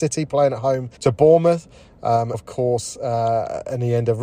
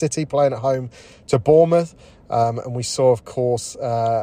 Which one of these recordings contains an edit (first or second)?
first